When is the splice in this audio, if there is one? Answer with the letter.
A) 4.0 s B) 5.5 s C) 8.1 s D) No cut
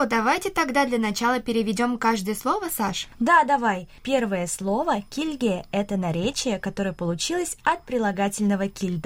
D